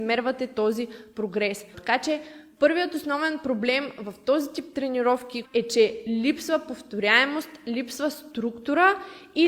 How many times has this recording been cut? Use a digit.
2